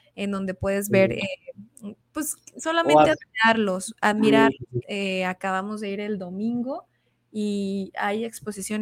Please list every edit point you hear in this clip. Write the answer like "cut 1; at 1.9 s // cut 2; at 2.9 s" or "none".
cut 1; at 4.8 s